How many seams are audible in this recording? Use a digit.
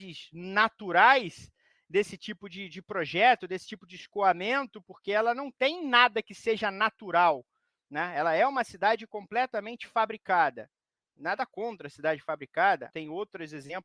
1